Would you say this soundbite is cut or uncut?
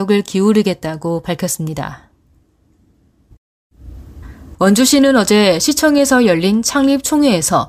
cut